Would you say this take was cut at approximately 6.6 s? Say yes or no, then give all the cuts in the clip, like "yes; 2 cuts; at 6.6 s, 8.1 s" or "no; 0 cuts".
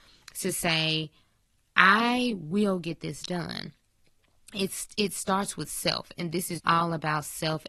yes; 1 cut; at 6.6 s